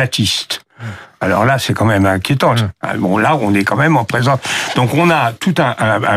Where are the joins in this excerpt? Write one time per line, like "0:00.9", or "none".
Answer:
0:02.5